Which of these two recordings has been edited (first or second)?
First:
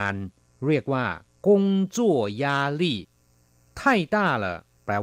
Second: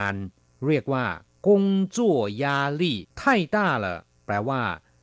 second